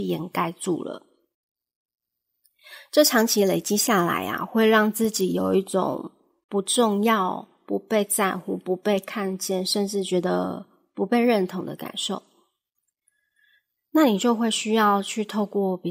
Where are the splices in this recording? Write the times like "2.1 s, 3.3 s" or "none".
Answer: none